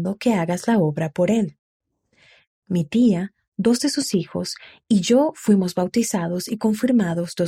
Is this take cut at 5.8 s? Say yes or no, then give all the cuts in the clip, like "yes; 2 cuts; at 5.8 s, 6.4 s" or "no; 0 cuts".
no; 1 cut; at 2.5 s